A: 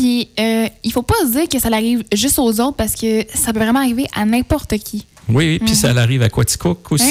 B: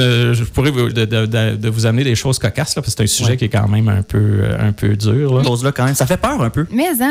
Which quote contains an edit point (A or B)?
B